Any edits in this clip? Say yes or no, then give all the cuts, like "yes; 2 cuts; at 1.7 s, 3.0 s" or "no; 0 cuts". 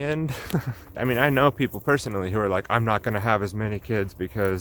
yes; 1 cut; at 0.9 s